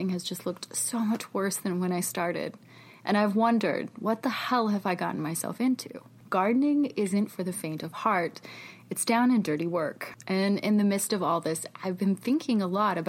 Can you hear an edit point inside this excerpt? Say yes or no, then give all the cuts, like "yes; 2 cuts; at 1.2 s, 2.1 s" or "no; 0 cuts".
no; 0 cuts